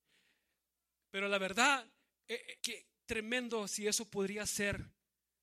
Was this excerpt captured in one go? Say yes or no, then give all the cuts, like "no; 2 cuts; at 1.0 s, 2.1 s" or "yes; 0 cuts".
no; 1 cut; at 2.6 s